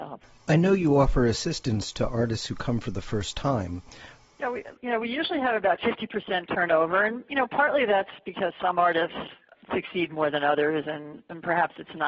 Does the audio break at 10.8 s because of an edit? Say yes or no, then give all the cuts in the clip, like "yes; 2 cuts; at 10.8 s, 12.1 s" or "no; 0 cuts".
no; 2 cuts; at 4.2 s, 9.6 s